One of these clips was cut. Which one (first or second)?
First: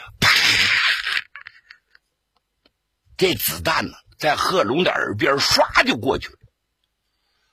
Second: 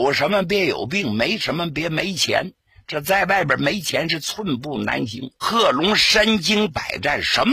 second